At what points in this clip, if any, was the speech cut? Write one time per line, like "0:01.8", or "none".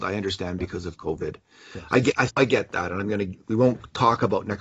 0:02.3
0:03.4